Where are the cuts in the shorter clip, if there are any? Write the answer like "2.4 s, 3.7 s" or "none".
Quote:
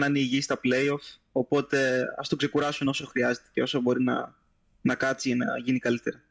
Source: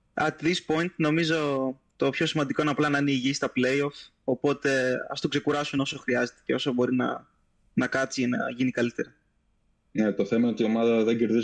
none

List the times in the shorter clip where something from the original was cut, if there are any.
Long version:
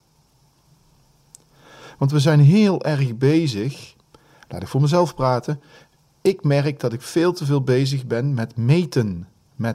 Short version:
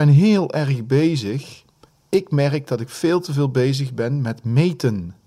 1.9 s

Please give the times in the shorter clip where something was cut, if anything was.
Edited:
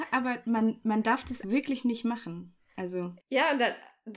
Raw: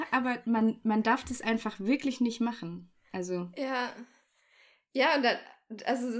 1.4 s, 3.2 s

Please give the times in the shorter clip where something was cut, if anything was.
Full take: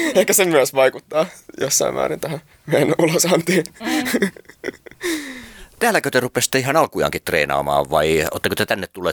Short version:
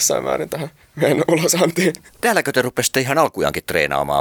2.1 s

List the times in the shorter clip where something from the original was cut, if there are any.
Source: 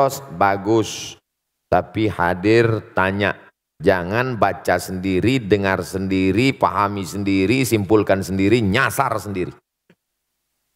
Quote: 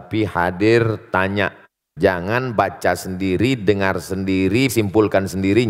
4.7 s

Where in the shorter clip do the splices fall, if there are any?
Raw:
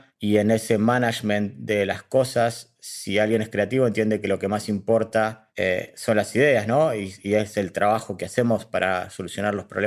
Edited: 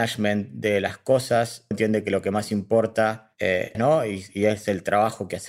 1.7 s, 3.7 s

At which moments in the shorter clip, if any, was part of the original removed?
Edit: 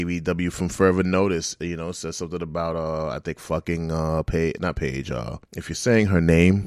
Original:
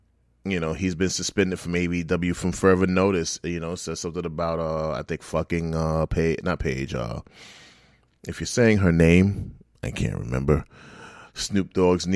5.4 s

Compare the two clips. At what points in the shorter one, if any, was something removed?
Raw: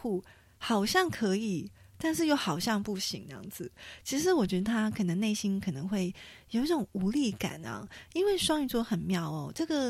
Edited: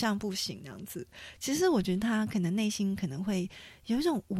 none

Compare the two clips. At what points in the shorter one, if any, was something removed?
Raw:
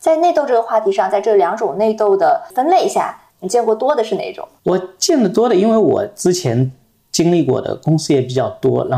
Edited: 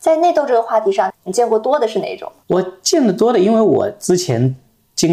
1.1 s

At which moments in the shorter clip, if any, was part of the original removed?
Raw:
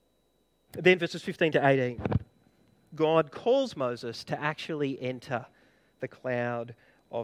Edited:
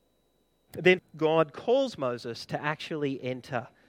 1.0 s

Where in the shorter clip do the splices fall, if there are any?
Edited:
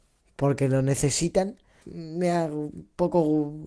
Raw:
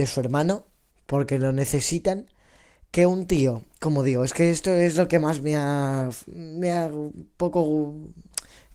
1.8 s

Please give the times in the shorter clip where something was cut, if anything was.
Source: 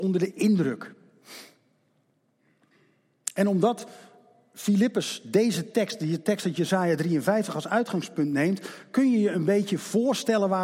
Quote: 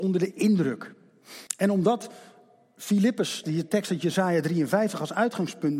1.5 s, 3.4 s

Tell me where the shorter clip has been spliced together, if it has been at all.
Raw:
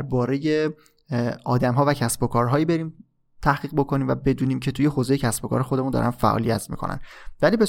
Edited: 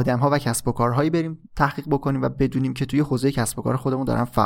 1.5 s

